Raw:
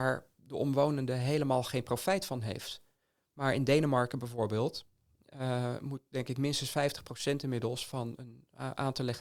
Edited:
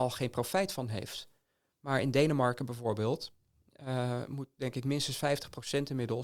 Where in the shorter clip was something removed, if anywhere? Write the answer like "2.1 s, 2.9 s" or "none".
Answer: none